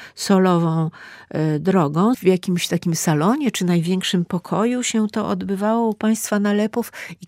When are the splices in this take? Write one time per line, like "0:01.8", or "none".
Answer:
0:02.1